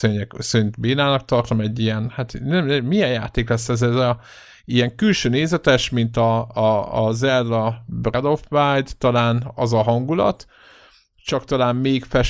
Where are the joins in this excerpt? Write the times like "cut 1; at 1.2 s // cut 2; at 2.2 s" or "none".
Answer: none